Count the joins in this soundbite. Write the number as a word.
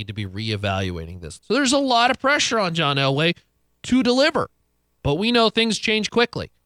two